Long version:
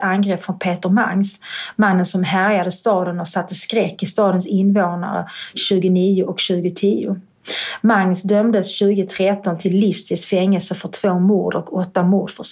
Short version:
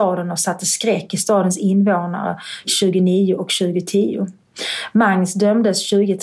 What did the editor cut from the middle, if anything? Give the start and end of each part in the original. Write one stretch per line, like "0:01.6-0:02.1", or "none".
none

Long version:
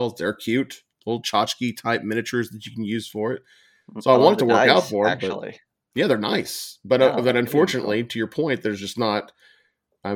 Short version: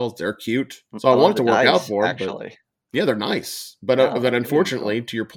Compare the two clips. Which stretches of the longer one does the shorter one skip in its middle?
0:00.9-0:03.9

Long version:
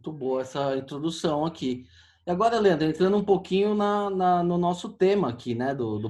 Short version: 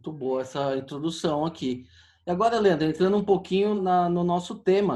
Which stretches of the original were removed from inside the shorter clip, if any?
0:03.8-0:04.1

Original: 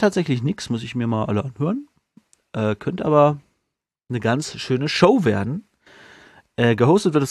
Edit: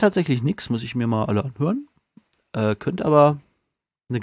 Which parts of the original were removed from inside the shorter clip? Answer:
none

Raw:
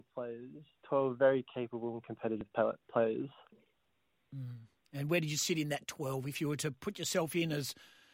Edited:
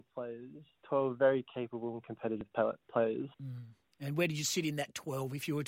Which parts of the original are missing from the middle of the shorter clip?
0:03.3-0:04.3

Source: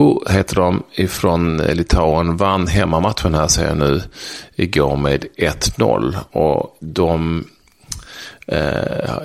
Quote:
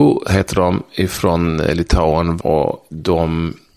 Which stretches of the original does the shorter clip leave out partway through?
0:02.4-0:06.3

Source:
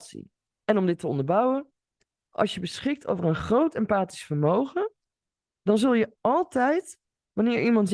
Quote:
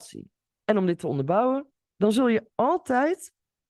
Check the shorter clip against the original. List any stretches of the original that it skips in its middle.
0:01.8-0:05.5

